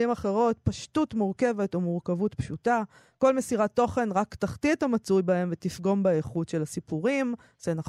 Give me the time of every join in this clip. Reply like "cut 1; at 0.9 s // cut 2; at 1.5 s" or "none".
none